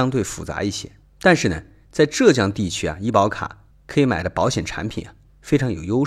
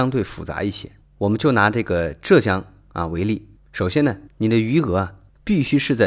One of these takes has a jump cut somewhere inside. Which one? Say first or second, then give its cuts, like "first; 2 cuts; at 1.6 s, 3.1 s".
second; 2 cuts; at 1.0 s, 4.3 s